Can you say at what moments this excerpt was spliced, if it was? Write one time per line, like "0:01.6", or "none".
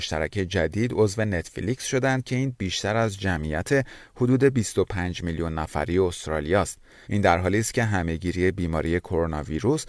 0:07.0